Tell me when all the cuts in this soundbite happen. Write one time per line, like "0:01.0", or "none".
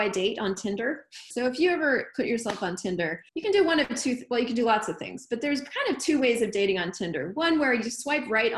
0:01.3
0:03.3